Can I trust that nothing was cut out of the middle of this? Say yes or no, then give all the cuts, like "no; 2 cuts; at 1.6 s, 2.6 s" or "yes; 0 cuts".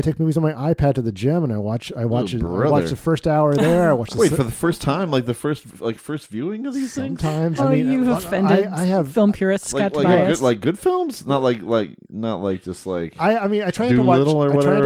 no; 1 cut; at 7.6 s